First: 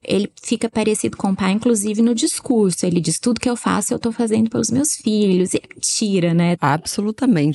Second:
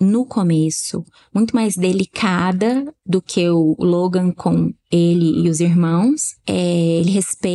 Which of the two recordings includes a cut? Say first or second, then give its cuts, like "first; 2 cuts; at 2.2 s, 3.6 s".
first; 1 cut; at 6.6 s